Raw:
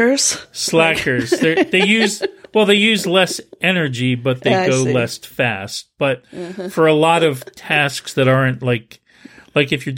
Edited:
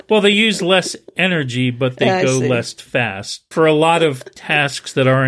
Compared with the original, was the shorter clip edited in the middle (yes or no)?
yes